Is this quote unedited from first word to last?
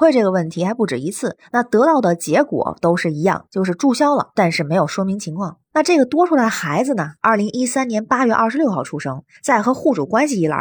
yes; 0 cuts

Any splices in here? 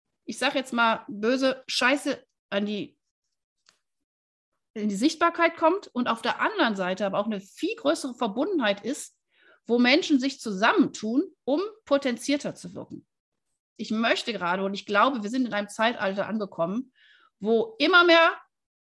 yes; 1 cut; at 13.8 s

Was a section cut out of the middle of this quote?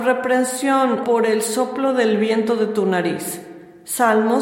yes; 1 cut; at 1.0 s

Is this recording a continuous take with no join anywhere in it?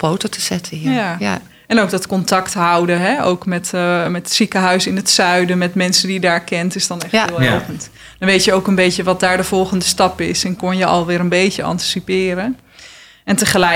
yes; 0 cuts

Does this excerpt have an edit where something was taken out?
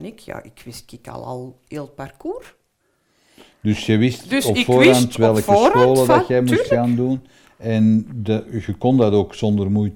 no; 0 cuts

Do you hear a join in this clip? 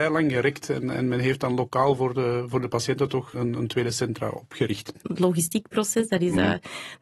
yes; 2 cuts; at 3.3 s, 5.0 s

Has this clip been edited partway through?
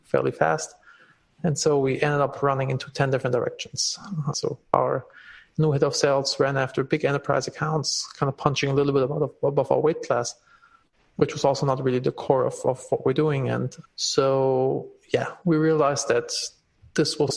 yes; 1 cut; at 4.3 s

